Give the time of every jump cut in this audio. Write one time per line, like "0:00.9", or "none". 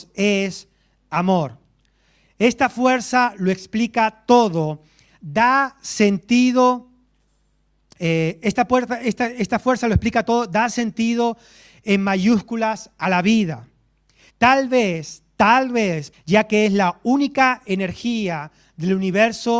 0:14.3
0:16.1